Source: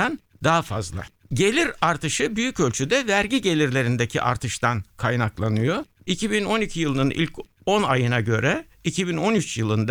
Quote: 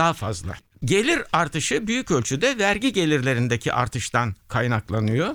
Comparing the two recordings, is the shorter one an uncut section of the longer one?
yes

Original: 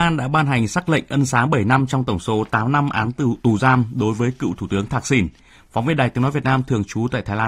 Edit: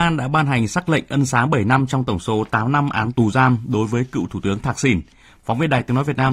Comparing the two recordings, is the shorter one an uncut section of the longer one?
no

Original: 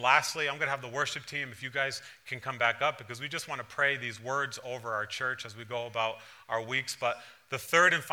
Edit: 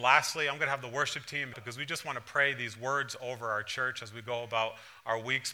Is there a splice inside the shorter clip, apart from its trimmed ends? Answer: yes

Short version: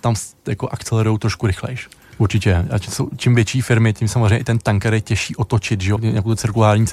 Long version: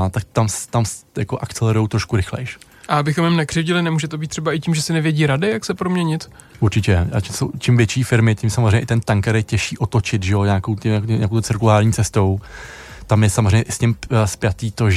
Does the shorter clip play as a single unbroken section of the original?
no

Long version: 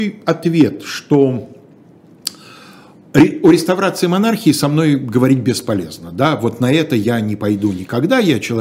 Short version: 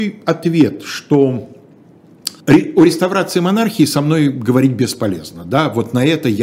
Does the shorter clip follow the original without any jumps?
no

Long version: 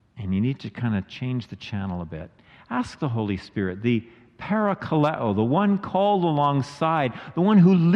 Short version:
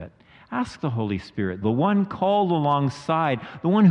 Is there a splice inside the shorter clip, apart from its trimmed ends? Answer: yes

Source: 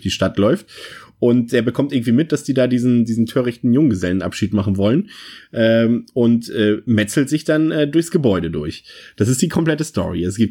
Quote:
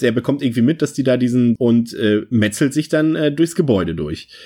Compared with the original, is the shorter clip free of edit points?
no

